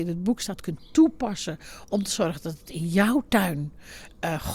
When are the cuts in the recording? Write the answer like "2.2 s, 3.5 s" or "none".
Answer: none